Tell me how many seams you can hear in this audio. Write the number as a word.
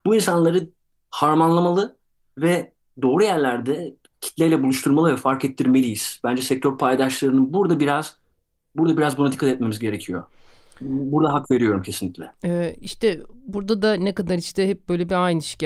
zero